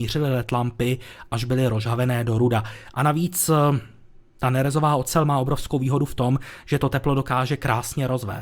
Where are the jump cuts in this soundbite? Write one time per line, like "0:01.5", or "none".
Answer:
0:02.9